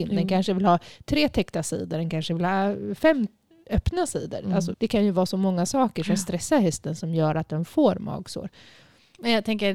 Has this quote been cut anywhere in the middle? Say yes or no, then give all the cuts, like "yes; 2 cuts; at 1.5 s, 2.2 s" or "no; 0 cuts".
yes; 1 cut; at 4.7 s